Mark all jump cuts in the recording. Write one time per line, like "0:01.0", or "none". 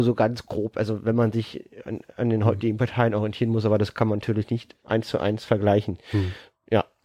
none